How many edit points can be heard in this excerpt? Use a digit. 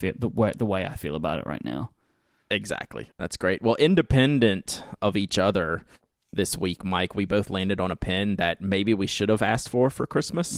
1